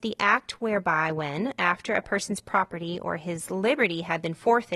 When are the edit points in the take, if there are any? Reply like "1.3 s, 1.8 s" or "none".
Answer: none